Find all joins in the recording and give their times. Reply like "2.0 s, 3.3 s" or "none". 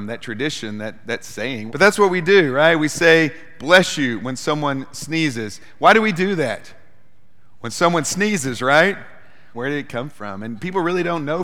1.7 s, 7.5 s, 9.5 s